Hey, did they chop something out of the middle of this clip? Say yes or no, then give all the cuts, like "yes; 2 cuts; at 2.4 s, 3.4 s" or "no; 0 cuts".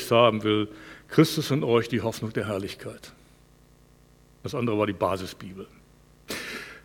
no; 0 cuts